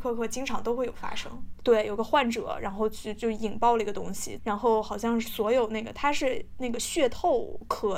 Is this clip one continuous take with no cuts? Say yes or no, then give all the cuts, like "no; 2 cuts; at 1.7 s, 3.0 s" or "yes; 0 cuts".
no; 2 cuts; at 1.6 s, 4.4 s